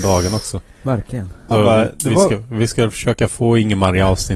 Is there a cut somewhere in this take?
yes; 1 cut; at 1.5 s

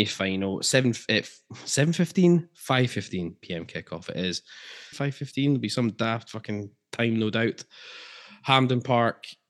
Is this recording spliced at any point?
yes; 1 cut; at 4.9 s

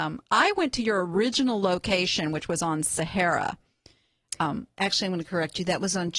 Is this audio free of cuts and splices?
yes; 0 cuts

